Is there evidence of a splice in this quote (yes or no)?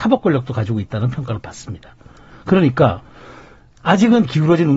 no